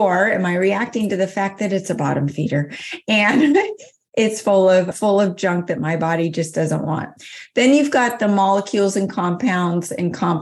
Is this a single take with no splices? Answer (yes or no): no